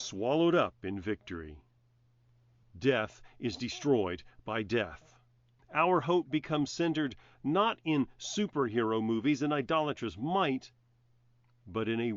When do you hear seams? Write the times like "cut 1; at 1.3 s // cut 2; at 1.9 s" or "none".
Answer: cut 1; at 2.6 s // cut 2; at 5.6 s